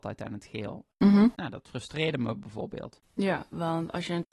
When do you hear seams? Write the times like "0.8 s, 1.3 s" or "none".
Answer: 3.0 s